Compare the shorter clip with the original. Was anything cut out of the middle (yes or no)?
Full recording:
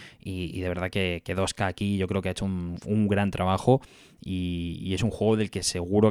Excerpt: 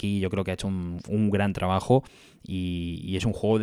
no